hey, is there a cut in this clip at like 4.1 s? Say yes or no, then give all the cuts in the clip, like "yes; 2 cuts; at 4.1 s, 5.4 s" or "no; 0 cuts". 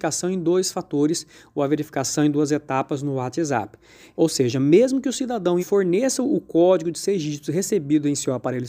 yes; 2 cuts; at 4.1 s, 5.6 s